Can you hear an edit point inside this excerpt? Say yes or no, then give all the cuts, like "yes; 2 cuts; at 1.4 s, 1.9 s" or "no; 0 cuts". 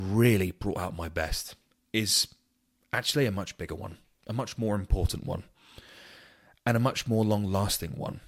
no; 0 cuts